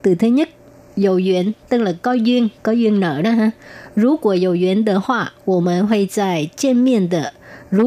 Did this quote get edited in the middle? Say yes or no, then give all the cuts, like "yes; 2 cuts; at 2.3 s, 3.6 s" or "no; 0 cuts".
no; 0 cuts